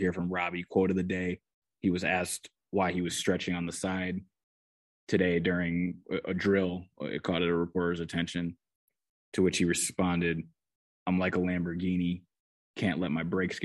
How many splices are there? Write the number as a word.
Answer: zero